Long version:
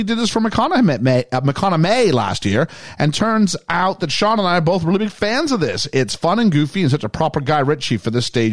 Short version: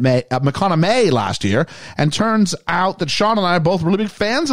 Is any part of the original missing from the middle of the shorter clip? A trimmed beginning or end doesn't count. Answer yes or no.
no